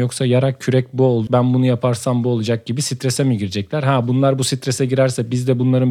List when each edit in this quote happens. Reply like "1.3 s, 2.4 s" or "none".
1.3 s